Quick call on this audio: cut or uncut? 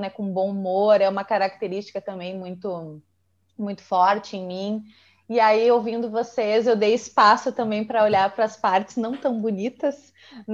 uncut